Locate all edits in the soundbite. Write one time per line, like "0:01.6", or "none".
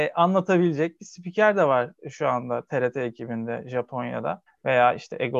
0:04.5

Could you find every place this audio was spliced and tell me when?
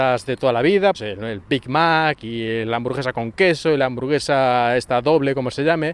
0:00.9

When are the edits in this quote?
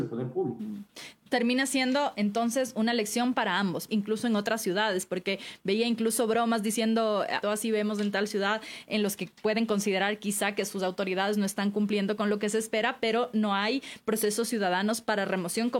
0:03.9
0:07.4

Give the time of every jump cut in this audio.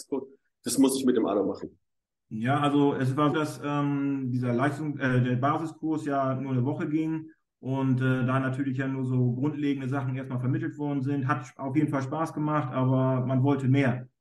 0:03.3

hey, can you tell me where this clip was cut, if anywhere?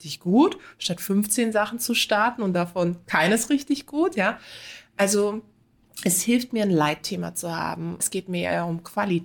0:08.0

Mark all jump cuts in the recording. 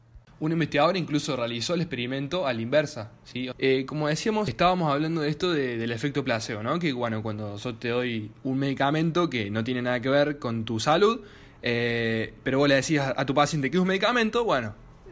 0:03.5

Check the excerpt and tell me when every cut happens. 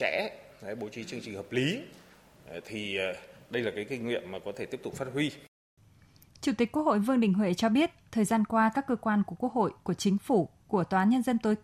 none

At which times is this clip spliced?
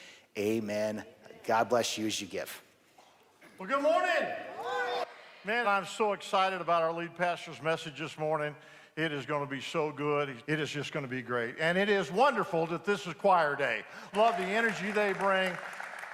0:05.6
0:10.4
0:14.1

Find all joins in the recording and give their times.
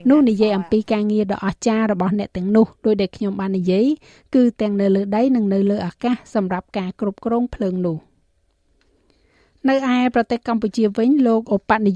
none

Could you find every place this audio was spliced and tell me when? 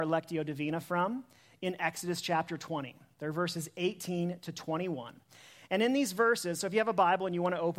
none

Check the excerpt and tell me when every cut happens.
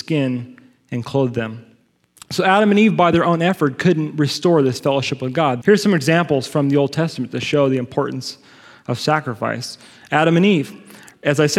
0:05.6

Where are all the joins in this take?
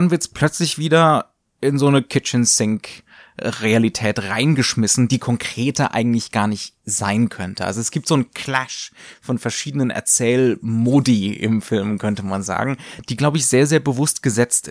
none

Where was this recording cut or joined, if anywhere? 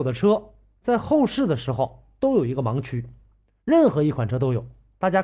none

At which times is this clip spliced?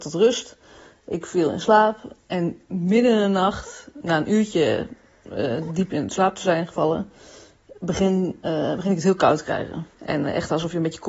0:09.9

